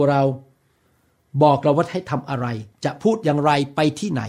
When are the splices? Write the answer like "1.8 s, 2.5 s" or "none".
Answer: 2.7 s